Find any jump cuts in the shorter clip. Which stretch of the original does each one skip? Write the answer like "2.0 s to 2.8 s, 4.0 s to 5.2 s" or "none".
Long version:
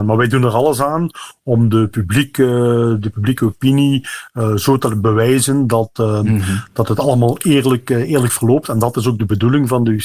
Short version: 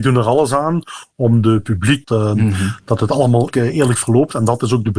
2.3 s to 5.9 s, 7.4 s to 7.8 s